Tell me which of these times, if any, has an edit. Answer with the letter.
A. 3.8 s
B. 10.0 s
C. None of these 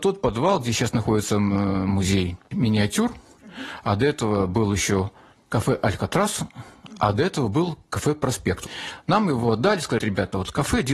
B